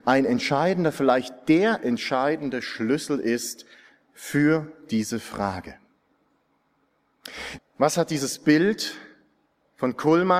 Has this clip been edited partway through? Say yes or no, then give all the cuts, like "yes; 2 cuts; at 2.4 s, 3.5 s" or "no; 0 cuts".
yes; 1 cut; at 7.6 s